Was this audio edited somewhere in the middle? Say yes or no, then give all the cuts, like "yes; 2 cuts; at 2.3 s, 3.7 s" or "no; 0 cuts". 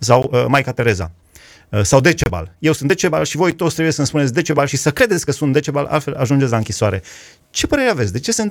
no; 0 cuts